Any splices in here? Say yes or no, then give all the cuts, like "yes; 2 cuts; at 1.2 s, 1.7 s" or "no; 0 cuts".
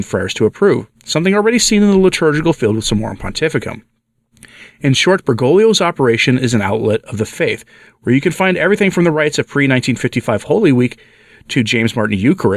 no; 0 cuts